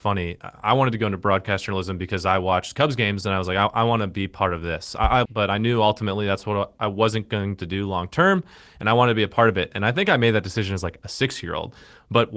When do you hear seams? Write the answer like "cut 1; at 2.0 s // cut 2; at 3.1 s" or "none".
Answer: cut 1; at 5.3 s